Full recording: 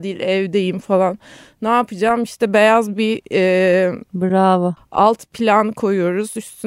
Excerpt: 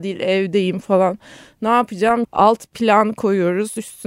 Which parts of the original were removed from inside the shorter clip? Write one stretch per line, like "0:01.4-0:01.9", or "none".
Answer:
0:02.2-0:04.8